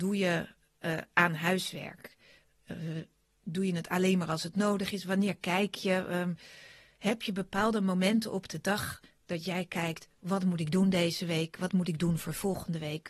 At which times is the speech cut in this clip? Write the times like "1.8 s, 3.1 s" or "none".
none